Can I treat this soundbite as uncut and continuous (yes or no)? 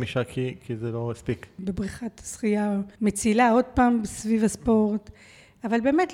no